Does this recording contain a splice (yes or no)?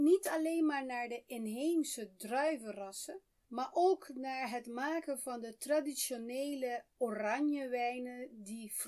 no